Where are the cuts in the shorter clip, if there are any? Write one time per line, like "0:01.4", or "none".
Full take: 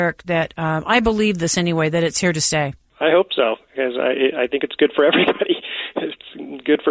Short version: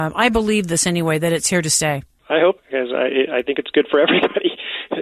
0:02.6